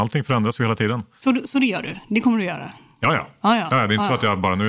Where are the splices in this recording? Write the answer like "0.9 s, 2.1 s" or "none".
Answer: none